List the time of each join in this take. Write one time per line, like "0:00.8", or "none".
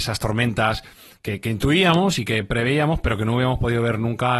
none